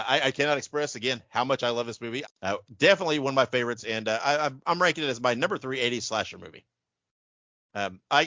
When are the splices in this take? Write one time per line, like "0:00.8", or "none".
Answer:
0:02.2